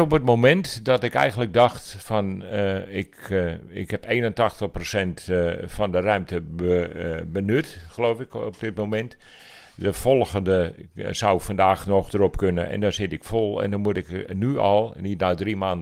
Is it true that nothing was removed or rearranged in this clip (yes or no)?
yes